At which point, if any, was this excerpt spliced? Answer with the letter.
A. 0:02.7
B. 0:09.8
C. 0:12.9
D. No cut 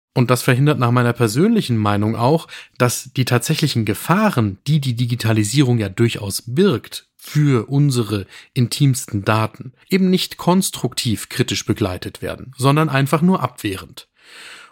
B